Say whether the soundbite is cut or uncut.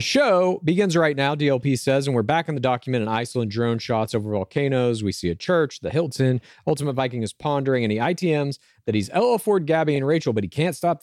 uncut